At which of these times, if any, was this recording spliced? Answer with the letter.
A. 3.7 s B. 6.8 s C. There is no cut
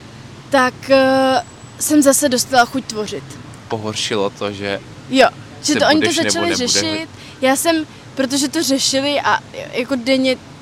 A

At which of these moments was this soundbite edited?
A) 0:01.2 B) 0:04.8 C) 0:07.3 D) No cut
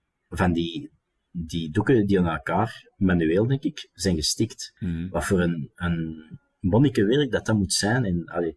B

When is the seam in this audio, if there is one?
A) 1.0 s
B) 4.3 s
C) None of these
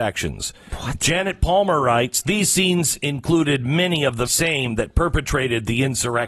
B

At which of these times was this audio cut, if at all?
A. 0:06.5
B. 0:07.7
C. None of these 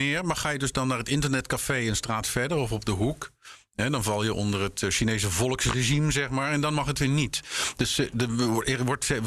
C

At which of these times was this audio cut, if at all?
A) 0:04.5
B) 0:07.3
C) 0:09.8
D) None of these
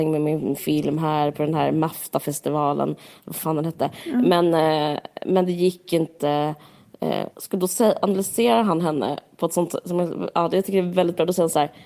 B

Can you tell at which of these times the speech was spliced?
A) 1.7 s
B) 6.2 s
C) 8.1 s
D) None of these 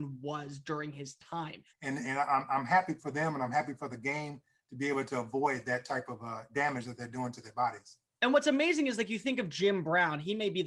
A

